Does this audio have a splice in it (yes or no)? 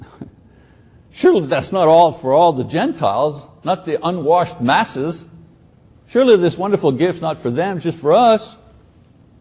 no